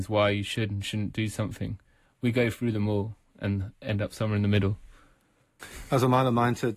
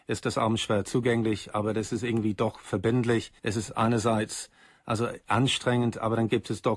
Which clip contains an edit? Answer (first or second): second